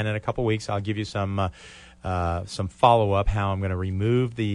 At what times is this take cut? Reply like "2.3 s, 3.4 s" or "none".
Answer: none